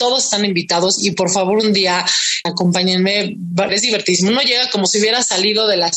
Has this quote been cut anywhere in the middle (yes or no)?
yes